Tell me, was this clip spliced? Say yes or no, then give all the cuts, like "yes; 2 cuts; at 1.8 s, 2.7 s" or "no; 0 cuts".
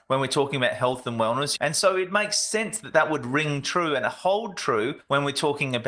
yes; 1 cut; at 1.6 s